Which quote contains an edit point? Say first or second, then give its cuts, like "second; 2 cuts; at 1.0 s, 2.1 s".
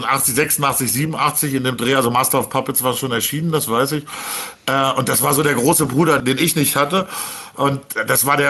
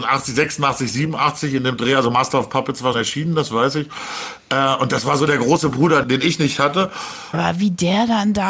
second; 2 cuts; at 2.9 s, 7.3 s